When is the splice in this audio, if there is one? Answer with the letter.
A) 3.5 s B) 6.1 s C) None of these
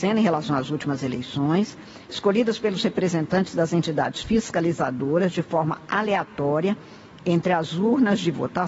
C